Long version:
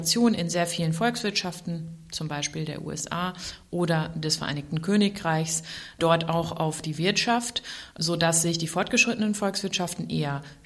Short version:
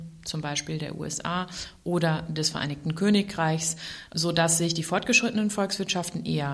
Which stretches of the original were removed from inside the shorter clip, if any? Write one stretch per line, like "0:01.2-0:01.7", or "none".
0:05.9-0:07.9